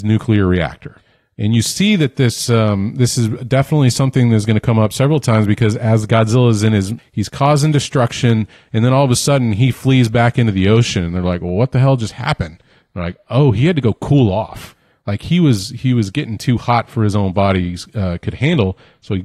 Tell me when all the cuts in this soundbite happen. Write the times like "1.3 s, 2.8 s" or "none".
7.0 s